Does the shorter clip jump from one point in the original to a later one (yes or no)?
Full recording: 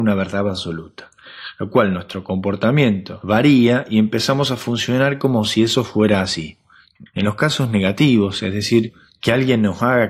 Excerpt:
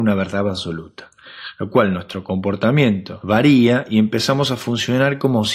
no